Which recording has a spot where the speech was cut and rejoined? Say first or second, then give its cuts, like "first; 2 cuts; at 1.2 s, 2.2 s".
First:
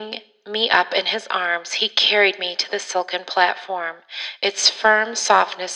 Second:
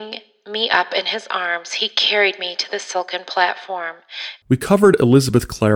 second; 1 cut; at 4.4 s